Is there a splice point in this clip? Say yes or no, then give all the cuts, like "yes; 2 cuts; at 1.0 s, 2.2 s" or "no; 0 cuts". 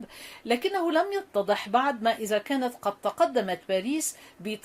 no; 0 cuts